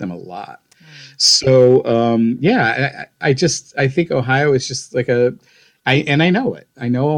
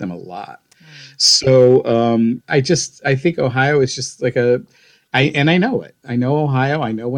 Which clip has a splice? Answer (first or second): second